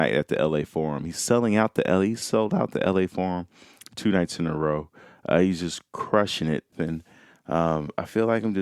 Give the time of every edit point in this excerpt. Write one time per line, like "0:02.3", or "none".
0:06.7